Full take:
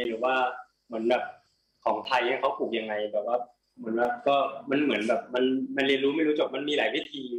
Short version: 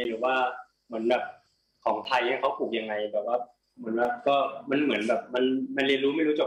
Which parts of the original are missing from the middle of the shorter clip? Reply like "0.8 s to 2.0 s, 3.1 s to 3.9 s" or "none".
none